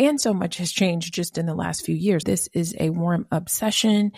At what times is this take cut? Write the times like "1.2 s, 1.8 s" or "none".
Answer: 2.2 s